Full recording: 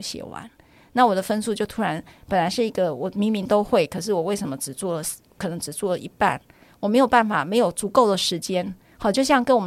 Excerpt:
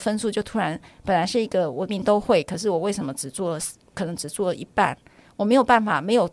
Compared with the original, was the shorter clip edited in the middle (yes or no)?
yes